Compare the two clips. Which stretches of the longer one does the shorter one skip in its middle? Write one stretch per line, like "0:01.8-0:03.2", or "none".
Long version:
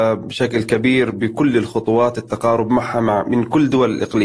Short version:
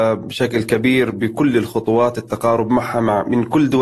none